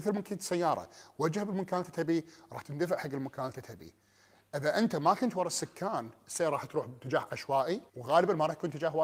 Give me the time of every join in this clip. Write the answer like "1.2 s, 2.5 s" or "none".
7.9 s